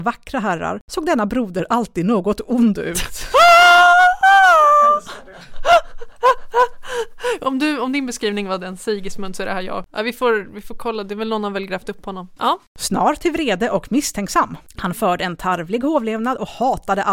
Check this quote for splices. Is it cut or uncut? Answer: cut